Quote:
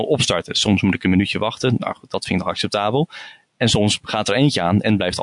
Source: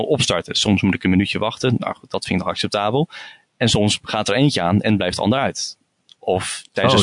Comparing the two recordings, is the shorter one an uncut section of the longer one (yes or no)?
yes